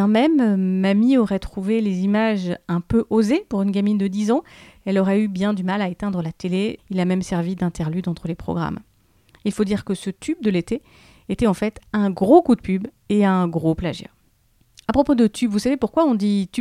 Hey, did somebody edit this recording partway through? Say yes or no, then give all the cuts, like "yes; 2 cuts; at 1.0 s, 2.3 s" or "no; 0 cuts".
yes; 1 cut; at 6.8 s